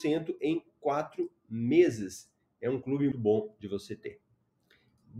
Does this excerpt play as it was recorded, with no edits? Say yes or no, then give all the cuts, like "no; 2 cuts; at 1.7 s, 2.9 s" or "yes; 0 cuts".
no; 1 cut; at 3.1 s